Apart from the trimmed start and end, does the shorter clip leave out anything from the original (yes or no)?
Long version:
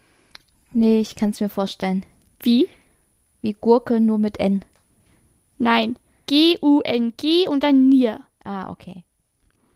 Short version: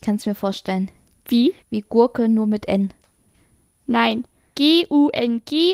yes